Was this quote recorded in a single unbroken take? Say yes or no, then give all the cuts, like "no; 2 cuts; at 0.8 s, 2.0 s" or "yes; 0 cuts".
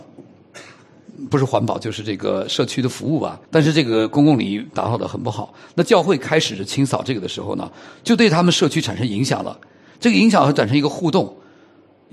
no; 1 cut; at 3.4 s